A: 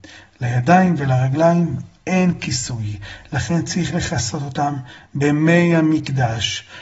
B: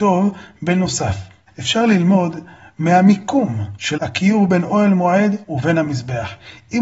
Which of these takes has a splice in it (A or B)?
B